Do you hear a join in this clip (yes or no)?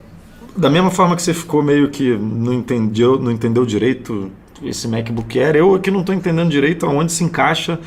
no